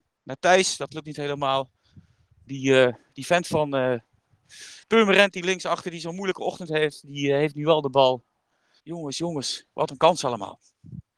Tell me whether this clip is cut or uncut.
cut